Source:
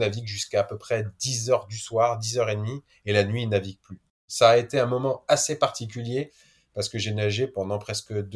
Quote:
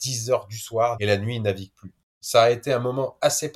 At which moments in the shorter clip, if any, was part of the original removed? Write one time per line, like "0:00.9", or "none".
0:01.0